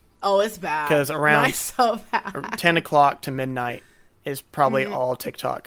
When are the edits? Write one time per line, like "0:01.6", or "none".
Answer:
none